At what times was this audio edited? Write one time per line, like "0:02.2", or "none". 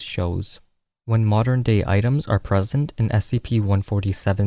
0:01.0